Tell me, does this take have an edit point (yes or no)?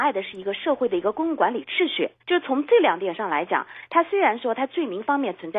yes